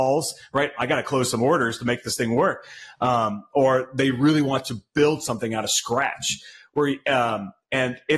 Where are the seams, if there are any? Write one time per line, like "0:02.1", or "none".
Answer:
none